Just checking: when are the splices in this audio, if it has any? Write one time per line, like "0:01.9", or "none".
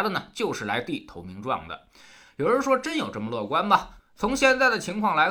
none